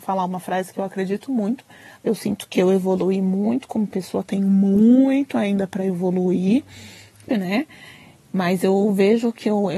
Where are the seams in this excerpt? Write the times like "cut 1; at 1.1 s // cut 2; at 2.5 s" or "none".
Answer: cut 1; at 2.0 s // cut 2; at 7.3 s